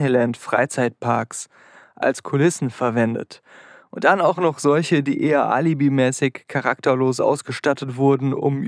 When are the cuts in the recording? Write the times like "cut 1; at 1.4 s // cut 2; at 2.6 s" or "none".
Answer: none

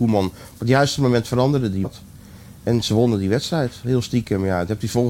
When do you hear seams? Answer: none

